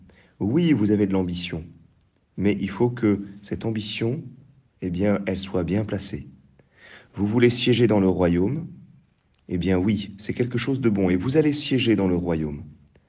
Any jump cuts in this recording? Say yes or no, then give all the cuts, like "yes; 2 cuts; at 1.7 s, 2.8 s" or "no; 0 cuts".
no; 0 cuts